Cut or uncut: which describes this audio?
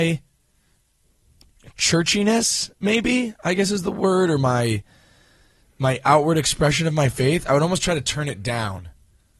uncut